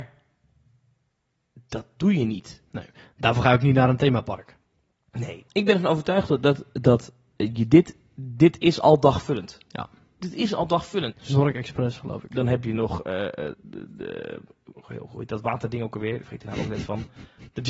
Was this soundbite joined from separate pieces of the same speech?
yes; 3 cuts; at 5.5 s, 11.1 s, 13.5 s

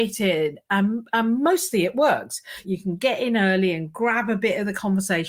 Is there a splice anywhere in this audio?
yes; 1 cut; at 2.6 s

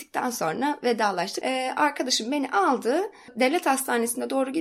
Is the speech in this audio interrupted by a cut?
yes; 1 cut; at 1.4 s

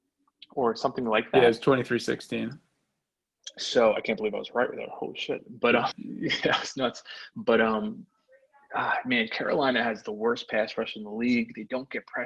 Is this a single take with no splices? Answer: no; 1 cut; at 5.9 s

